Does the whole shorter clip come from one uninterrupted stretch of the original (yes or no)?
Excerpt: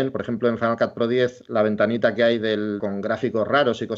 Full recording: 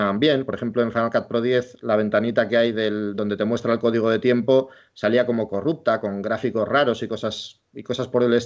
no